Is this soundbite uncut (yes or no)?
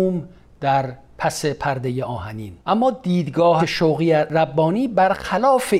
no